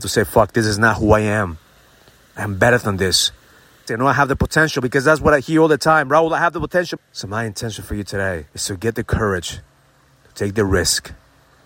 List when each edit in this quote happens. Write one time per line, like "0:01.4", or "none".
0:03.9
0:07.0
0:08.5